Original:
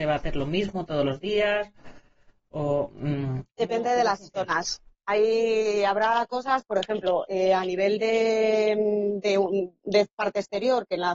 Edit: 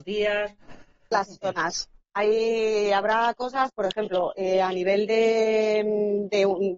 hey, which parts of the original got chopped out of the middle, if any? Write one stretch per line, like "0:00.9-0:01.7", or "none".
0:02.3-0:04.0